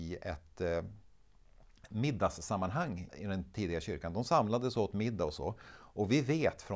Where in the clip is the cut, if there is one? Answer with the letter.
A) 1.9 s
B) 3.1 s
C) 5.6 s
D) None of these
B